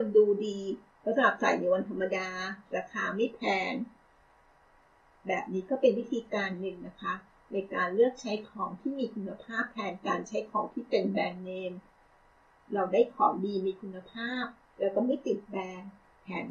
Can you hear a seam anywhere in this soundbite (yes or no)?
no